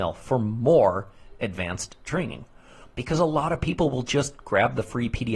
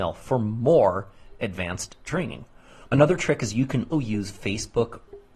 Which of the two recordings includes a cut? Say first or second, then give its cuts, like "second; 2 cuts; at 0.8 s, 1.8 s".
second; 2 cuts; at 2.9 s, 3.9 s